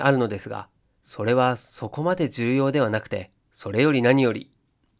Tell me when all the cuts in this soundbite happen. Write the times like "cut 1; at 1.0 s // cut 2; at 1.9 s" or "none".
cut 1; at 0.9 s // cut 2; at 3.4 s